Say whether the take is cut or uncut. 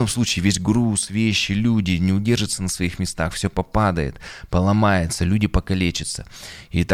uncut